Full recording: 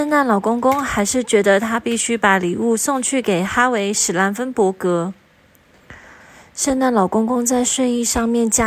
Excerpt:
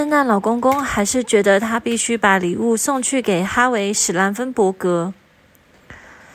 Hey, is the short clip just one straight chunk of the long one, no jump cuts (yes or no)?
yes